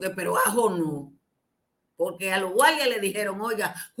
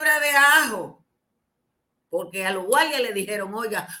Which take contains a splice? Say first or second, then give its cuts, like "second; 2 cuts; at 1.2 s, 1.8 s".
second; 1 cut; at 2.0 s